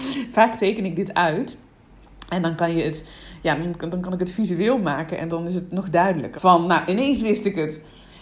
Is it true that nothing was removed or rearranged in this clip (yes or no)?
no